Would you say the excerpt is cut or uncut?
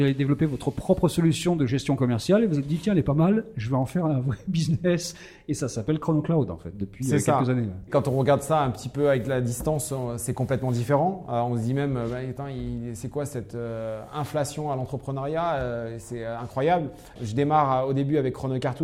cut